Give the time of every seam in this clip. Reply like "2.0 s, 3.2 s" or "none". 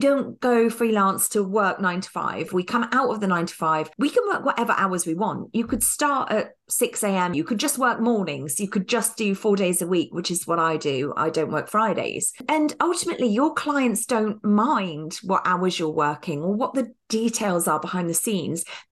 7.3 s

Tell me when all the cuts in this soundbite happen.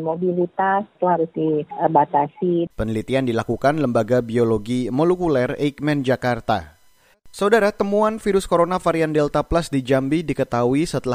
0.9 s, 2.7 s, 7.1 s

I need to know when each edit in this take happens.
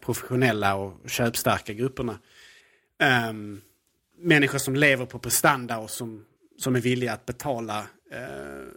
none

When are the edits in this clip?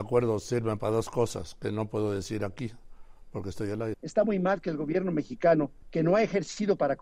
3.9 s, 5.8 s

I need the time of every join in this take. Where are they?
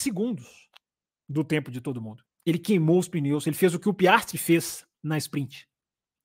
2.3 s

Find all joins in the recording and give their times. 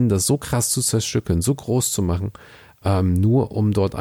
none

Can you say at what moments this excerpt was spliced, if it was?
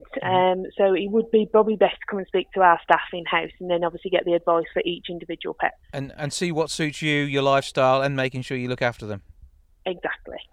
5.8 s

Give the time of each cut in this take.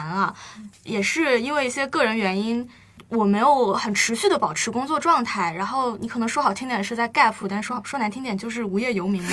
none

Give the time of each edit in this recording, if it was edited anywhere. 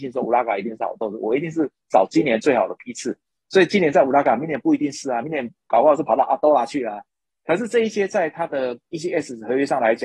none

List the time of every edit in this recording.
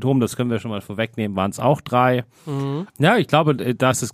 2.9 s

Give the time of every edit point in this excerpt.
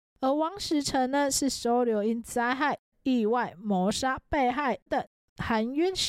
2.9 s, 4.9 s

